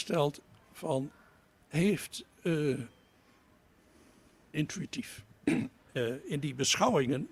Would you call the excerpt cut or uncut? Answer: cut